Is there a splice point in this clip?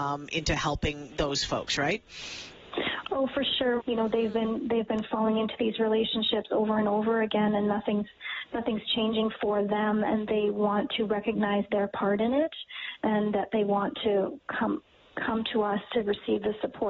yes; 1 cut; at 3.8 s

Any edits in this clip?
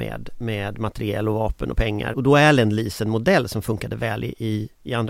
yes; 1 cut; at 2.1 s

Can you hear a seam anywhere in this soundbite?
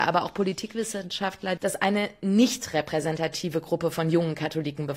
yes; 1 cut; at 1.6 s

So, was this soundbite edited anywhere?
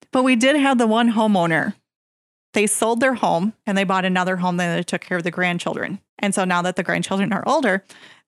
yes; 2 cuts; at 3.6 s, 6.1 s

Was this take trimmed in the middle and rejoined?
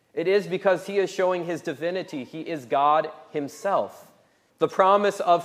yes; 1 cut; at 4.5 s

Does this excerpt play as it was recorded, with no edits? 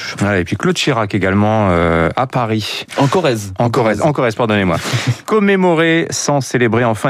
yes; 0 cuts

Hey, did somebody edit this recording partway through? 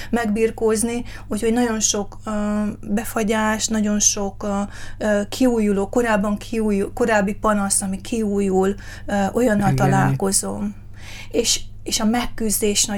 no; 0 cuts

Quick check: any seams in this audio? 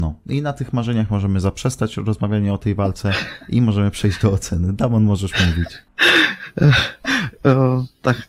no; 0 cuts

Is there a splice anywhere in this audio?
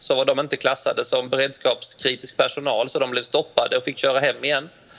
no; 0 cuts

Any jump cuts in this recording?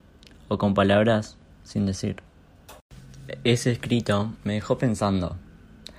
no; 0 cuts

